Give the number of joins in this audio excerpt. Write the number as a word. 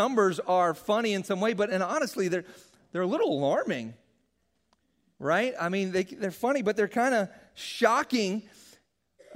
zero